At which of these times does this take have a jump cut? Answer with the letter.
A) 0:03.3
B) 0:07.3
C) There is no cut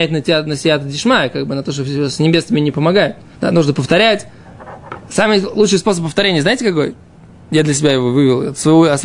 A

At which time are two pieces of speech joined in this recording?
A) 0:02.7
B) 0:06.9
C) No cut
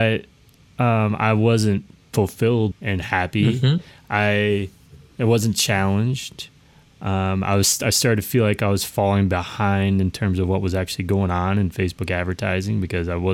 A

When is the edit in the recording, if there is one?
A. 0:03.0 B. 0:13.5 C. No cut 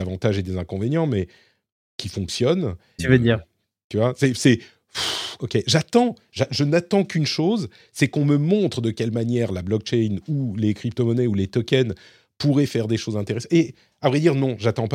A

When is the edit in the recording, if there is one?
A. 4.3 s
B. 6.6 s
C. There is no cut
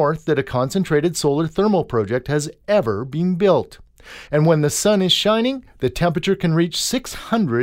A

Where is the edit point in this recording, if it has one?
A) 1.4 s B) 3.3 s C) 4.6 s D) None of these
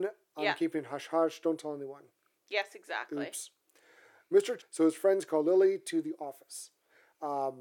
C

